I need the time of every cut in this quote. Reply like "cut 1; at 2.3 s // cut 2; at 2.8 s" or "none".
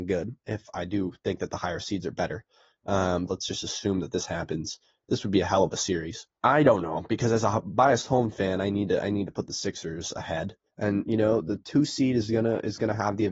cut 1; at 3.3 s // cut 2; at 6.4 s // cut 3; at 10.7 s